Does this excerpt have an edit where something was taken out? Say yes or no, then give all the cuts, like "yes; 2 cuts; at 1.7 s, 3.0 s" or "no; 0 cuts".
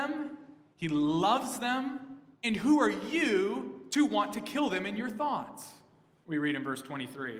yes; 2 cuts; at 2.4 s, 6.2 s